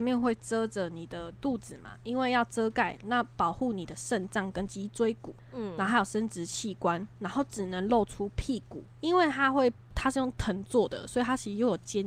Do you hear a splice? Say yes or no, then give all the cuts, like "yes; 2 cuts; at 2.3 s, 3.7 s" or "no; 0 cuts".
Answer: yes; 1 cut; at 8.9 s